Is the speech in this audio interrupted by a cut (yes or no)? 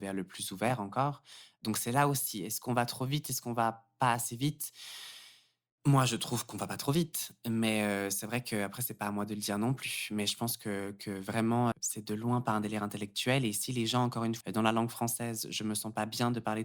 yes